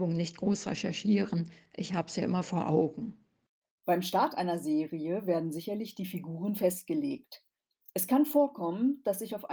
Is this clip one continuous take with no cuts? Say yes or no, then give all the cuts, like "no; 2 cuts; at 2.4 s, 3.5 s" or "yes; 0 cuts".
yes; 0 cuts